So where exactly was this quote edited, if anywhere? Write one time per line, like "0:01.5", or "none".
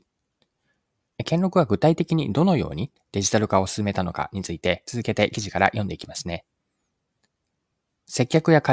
0:01.1